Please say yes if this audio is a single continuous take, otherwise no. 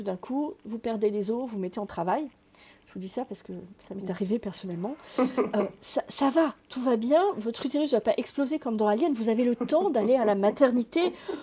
yes